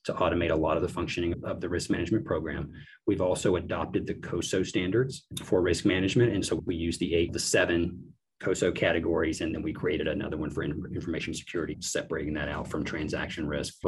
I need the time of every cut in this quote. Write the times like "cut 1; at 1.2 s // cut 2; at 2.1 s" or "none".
none